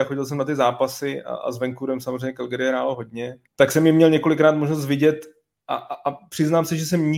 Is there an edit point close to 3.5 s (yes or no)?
yes